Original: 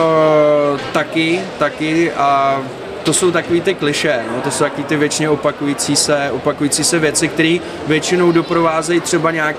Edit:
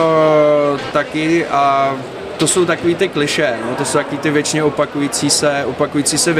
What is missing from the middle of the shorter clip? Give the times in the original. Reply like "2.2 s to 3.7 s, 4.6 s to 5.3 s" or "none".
0.9 s to 1.6 s